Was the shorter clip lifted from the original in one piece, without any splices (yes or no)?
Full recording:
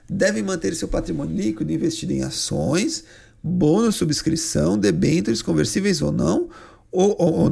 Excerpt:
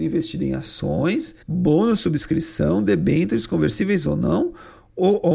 no